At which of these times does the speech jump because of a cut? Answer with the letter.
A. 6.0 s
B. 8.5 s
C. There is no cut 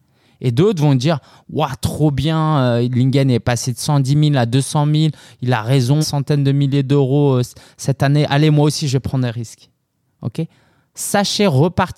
A